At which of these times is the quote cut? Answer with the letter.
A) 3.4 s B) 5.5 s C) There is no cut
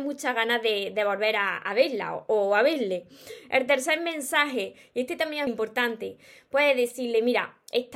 B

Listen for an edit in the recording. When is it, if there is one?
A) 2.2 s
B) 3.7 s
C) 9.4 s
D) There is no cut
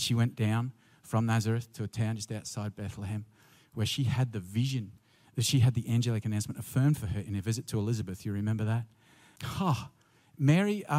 C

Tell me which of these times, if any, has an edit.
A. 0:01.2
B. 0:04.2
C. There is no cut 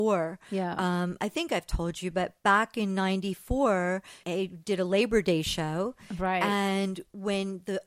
B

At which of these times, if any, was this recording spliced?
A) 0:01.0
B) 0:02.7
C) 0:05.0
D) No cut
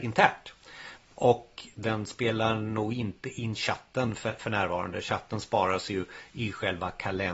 A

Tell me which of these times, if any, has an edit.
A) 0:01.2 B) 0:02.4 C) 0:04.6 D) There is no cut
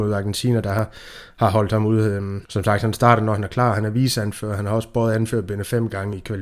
B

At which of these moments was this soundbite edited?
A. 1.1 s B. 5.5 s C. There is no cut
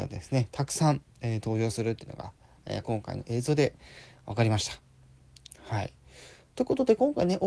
C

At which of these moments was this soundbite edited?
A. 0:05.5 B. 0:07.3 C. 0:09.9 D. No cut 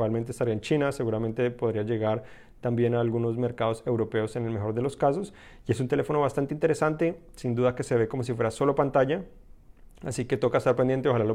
D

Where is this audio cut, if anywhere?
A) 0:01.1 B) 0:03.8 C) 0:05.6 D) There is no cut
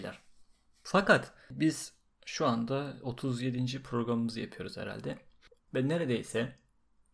C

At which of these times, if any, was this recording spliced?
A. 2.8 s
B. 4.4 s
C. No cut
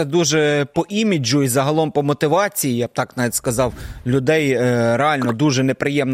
C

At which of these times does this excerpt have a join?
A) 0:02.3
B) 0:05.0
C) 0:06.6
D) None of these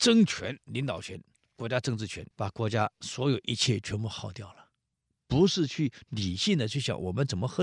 A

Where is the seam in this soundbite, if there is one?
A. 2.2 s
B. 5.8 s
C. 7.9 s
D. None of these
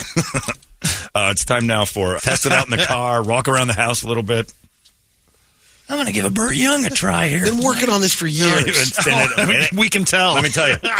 A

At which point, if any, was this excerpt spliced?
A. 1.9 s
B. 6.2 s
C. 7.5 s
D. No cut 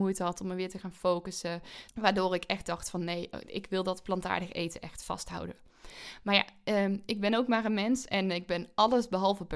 A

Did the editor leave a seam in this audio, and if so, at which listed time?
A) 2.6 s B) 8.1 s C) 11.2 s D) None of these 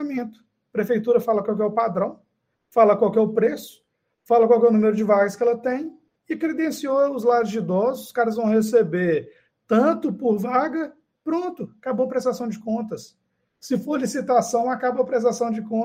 D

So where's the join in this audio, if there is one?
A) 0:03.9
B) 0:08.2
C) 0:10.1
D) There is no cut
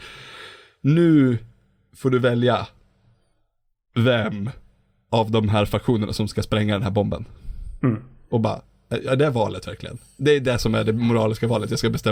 D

